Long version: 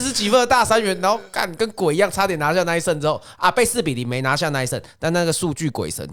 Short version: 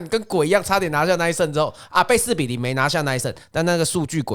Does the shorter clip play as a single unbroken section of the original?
yes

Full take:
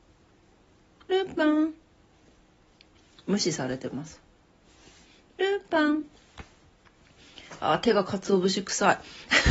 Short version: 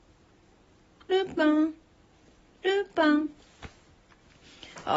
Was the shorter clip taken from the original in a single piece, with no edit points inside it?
no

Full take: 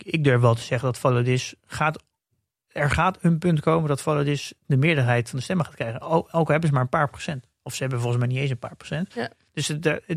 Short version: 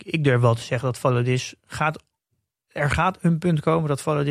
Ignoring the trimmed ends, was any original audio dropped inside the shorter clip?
no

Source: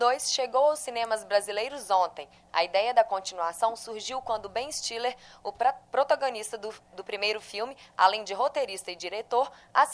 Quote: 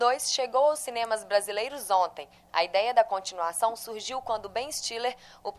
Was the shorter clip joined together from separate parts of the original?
no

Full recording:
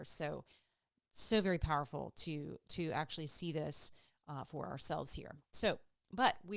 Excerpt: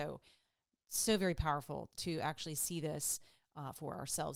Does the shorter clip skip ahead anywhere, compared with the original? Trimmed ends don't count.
yes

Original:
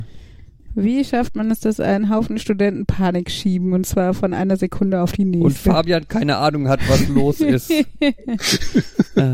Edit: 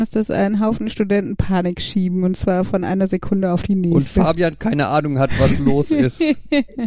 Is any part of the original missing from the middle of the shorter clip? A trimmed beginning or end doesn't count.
no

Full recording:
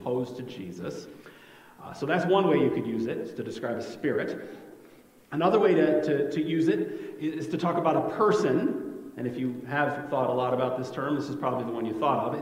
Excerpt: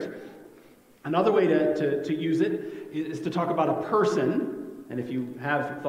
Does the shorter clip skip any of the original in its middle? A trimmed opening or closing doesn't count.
no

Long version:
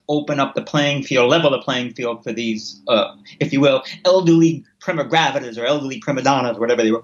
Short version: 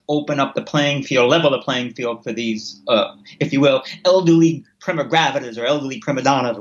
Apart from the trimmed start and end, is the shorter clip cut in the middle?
no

